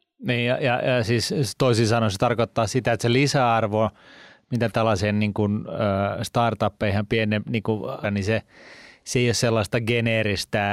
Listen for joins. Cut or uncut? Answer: cut